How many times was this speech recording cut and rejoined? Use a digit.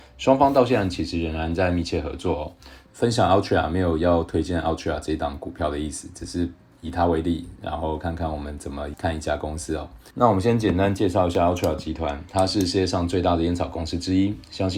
1